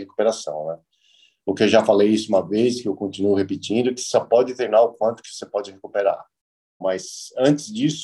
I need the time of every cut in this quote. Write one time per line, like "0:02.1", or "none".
0:06.8